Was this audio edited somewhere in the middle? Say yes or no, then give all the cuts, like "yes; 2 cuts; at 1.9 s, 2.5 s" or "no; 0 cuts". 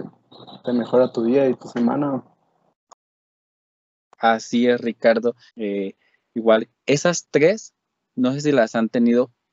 yes; 2 cuts; at 5.5 s, 6.7 s